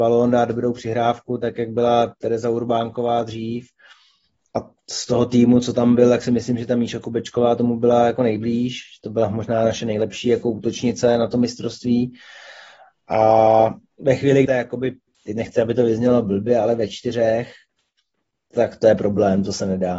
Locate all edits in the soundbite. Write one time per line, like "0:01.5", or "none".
0:14.5